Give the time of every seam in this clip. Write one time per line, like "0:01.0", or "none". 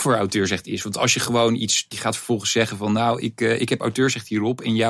0:01.9